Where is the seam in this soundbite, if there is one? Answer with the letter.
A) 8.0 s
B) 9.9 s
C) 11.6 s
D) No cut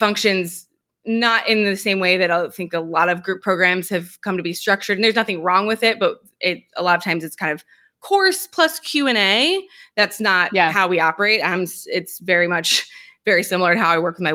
D